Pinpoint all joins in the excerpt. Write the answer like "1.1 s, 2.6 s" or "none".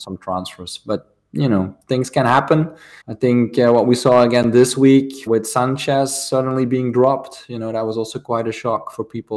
3.0 s, 5.3 s